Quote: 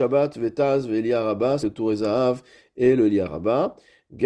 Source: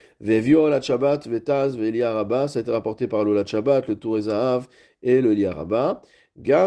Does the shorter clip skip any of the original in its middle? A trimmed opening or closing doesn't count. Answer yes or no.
yes